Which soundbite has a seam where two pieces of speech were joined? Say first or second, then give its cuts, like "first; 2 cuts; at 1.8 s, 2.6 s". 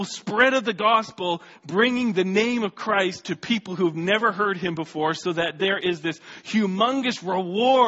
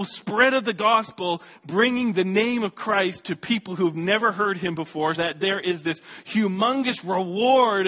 second; 1 cut; at 5.1 s